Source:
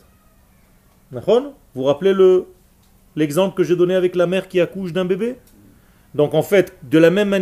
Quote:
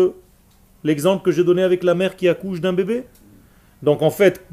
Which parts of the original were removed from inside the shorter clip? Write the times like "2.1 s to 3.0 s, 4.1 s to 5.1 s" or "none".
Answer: none